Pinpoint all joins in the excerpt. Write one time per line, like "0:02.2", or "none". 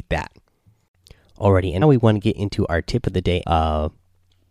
0:01.8
0:03.4